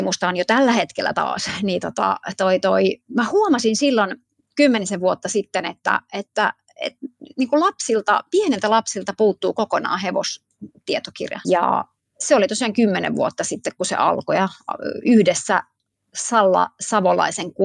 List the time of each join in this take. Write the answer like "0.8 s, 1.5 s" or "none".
11.4 s